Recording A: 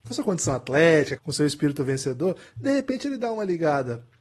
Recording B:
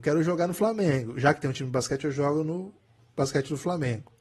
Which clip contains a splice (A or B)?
A